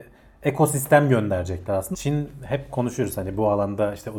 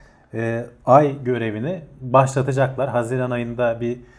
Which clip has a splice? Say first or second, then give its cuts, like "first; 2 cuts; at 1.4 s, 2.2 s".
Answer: first; 1 cut; at 1.9 s